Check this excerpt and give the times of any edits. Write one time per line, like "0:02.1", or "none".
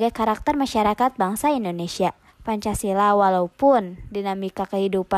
0:02.3